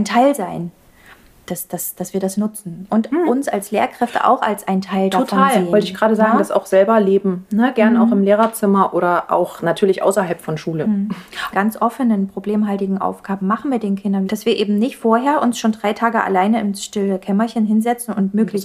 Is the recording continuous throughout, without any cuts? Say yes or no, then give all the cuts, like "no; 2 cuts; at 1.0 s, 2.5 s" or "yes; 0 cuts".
no; 2 cuts; at 11.5 s, 14.2 s